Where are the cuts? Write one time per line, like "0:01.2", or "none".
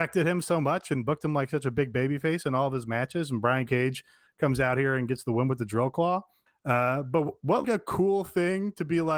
0:06.5
0:07.6